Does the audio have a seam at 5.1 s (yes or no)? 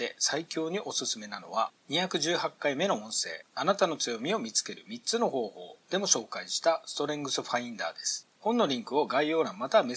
no